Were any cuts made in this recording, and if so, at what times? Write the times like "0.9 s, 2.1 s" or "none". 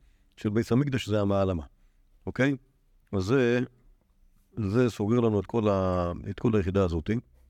none